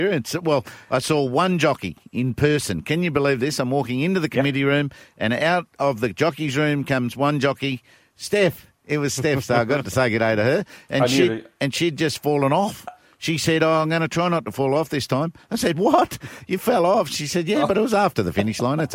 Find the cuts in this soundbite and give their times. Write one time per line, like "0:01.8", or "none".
none